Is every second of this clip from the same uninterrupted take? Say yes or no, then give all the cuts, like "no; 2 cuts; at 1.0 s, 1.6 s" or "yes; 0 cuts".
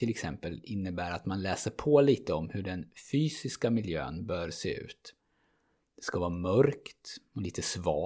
yes; 0 cuts